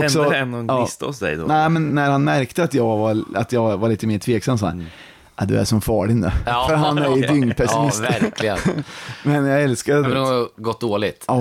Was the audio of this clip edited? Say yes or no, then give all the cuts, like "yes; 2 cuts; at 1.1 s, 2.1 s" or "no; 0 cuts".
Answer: yes; 2 cuts; at 1.9 s, 10.0 s